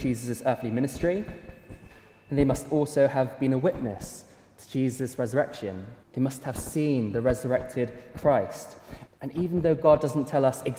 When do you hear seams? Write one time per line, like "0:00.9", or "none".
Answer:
0:06.0
0:09.1